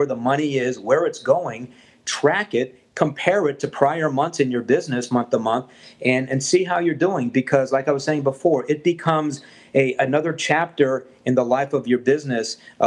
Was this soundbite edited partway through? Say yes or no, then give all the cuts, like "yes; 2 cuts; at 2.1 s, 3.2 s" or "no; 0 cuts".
no; 0 cuts